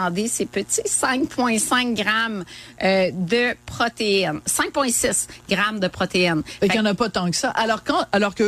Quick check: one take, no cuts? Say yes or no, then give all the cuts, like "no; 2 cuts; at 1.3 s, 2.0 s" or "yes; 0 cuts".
yes; 0 cuts